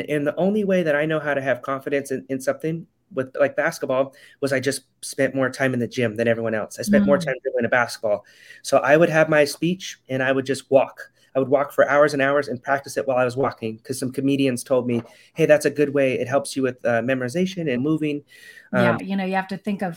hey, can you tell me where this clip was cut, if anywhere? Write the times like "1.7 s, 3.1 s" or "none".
17.8 s, 19.0 s